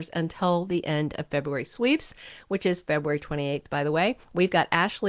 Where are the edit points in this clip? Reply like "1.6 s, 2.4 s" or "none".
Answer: none